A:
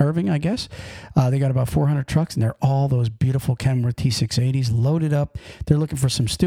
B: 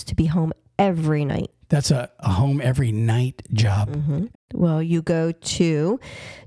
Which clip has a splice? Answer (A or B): B